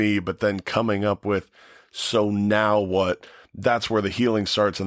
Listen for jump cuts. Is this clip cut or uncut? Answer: uncut